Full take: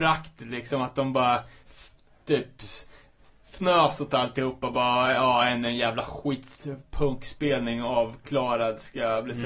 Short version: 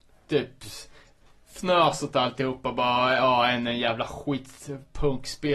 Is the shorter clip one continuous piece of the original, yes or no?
yes